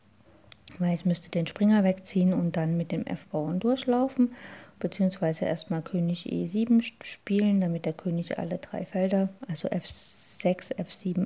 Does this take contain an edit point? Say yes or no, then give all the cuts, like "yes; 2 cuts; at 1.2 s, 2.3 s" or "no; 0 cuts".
no; 0 cuts